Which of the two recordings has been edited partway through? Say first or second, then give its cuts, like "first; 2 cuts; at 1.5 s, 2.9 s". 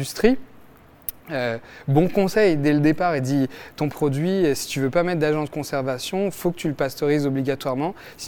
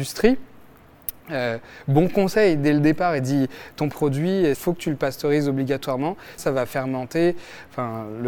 second; 2 cuts; at 4.5 s, 6.4 s